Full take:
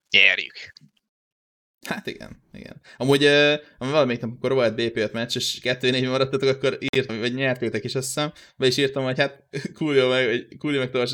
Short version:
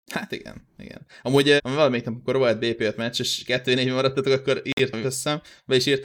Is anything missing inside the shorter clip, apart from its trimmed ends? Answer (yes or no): yes